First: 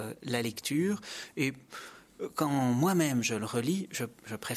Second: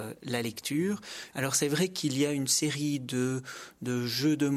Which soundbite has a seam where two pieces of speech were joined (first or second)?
second